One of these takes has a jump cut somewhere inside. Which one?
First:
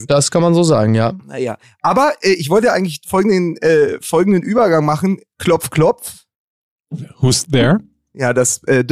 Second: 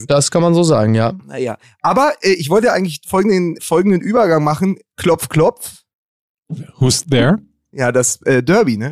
second; 1 cut; at 3.6 s

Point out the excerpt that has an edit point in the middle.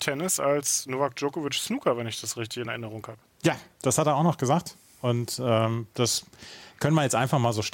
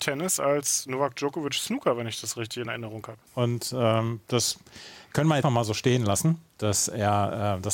second; 2 cuts; at 3.3 s, 5.4 s

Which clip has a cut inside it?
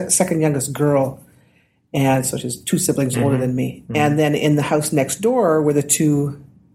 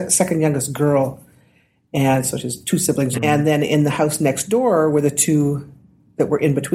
second; 1 cut; at 3.2 s

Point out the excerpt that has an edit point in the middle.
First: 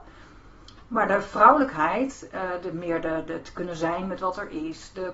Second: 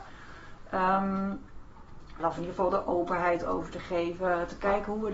second; 1 cut; at 2.2 s

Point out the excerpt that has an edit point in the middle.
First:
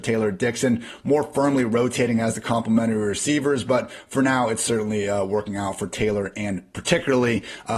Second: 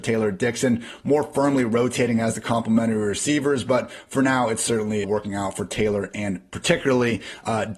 second; 1 cut; at 5.0 s

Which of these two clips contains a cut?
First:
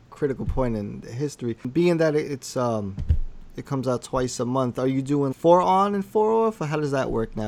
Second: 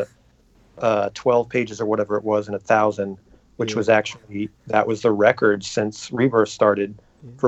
first; 1 cut; at 5.3 s

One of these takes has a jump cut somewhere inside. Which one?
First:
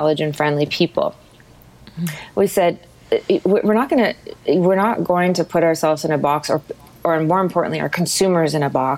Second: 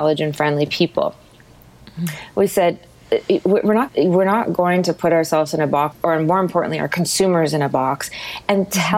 second; 2 cuts; at 3.9 s, 5.9 s

